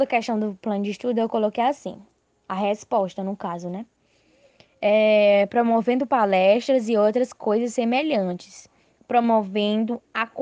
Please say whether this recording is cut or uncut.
uncut